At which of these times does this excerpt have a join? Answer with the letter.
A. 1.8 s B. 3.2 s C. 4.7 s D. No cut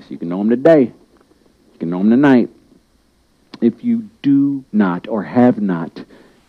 C